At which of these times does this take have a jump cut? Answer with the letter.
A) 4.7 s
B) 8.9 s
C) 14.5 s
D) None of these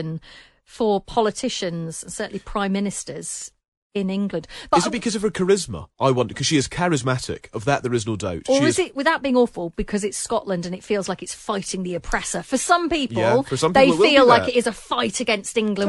D